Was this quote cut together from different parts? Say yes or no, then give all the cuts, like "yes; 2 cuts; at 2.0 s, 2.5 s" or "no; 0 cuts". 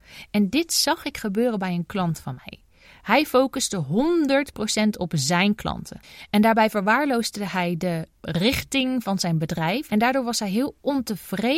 yes; 1 cut; at 9.9 s